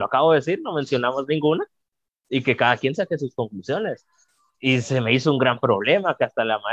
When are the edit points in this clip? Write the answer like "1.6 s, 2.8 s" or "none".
none